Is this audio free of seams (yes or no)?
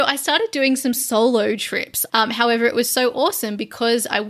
no